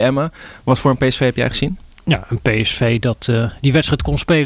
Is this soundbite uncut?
yes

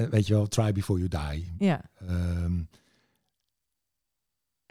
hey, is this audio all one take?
yes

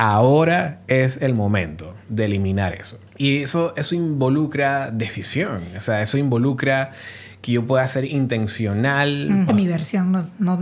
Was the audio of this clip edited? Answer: yes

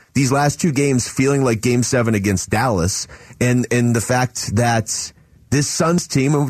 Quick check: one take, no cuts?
yes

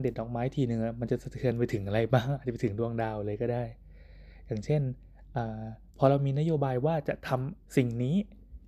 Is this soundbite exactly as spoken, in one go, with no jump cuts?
no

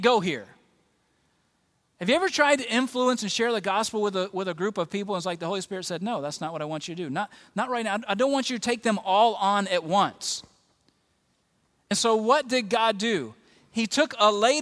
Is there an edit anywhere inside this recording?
no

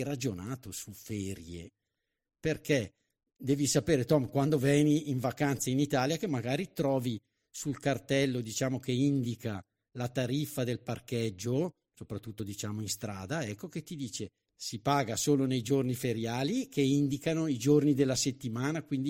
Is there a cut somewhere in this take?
no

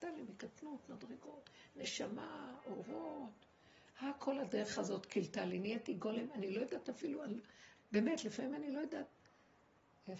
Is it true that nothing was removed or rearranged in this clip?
no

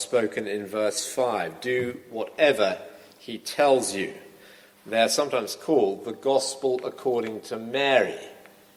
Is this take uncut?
yes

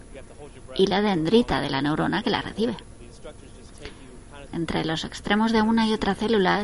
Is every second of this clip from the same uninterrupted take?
no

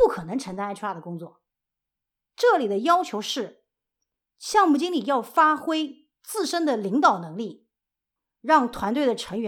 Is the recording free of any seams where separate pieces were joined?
yes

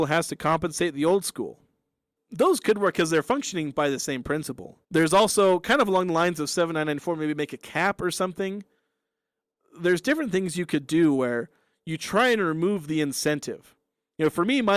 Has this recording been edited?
yes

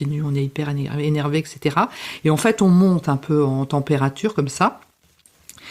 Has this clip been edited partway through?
no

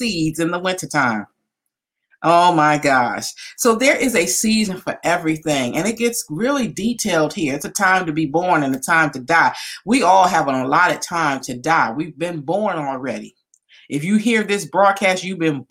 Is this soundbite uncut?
yes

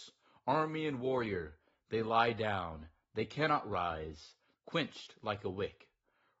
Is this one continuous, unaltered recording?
no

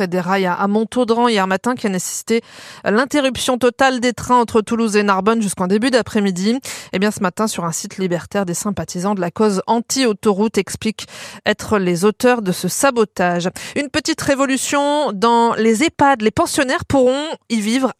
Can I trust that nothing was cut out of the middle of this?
yes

